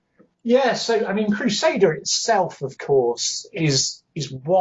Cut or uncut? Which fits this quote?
uncut